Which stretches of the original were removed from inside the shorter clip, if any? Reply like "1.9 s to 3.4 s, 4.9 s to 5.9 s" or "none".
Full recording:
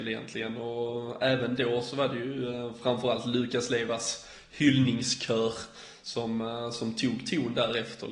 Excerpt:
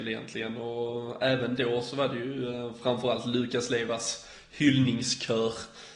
none